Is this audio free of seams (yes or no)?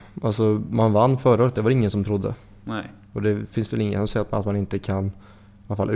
yes